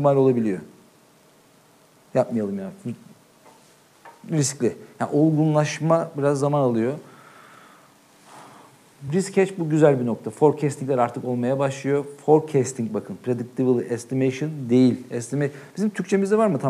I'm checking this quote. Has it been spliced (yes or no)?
no